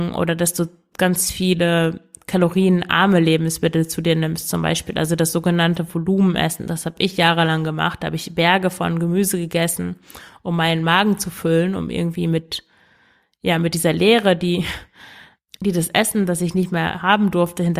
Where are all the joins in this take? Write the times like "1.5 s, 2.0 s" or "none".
none